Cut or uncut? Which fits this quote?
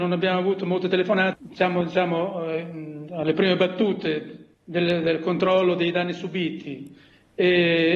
cut